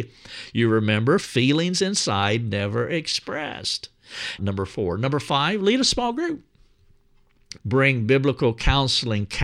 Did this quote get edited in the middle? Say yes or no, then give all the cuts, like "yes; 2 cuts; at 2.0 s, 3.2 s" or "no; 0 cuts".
yes; 3 cuts; at 1.2 s, 4.4 s, 7.6 s